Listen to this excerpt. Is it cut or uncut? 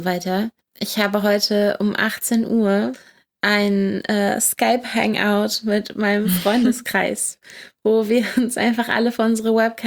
uncut